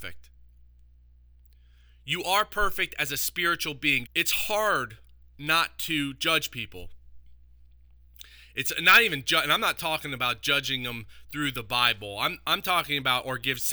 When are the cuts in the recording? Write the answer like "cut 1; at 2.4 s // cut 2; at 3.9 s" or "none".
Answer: cut 1; at 4.0 s